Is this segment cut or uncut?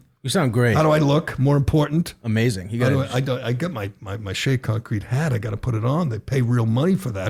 uncut